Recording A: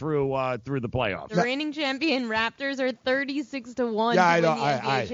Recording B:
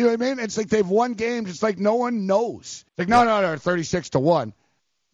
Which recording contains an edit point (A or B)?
B